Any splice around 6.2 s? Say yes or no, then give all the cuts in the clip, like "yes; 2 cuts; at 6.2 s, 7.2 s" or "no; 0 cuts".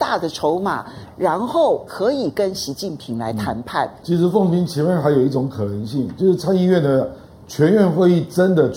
no; 1 cut; at 4.0 s